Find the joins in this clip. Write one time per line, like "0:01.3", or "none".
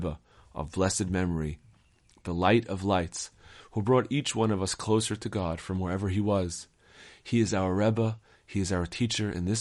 none

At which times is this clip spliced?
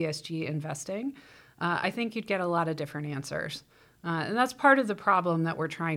none

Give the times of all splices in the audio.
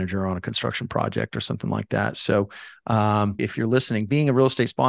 0:03.4

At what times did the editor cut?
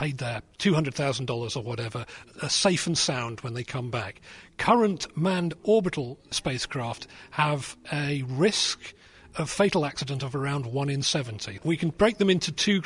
0:11.6

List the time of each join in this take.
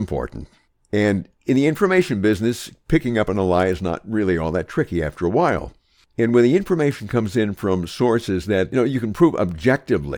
none

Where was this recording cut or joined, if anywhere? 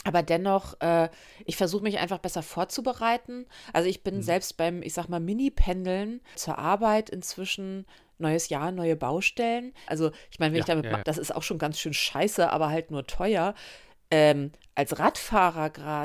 0:06.4
0:09.9
0:11.0

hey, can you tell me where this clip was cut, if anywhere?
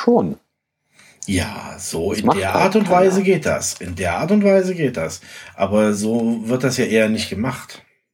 none

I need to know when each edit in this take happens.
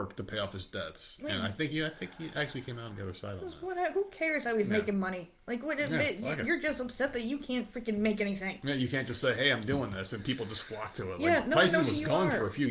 none

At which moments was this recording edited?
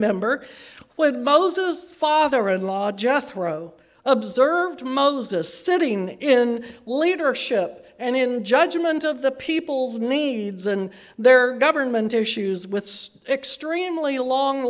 none

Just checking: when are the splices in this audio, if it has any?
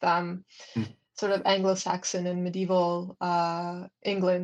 none

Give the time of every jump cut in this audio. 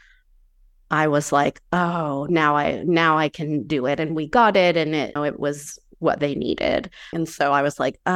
0:05.2
0:07.1

